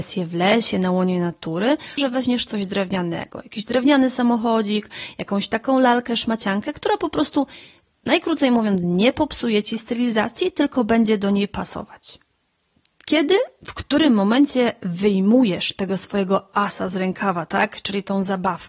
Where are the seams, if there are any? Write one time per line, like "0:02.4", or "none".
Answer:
0:02.0